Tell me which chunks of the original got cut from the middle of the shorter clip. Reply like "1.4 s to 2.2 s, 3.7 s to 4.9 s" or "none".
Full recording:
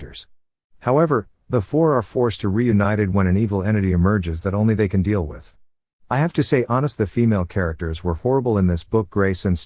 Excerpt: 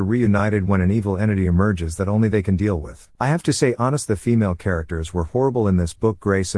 5.6 s to 6.1 s